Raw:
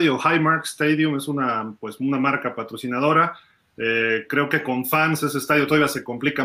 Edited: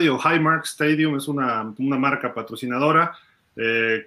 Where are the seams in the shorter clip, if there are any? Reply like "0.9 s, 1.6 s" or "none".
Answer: 1.8 s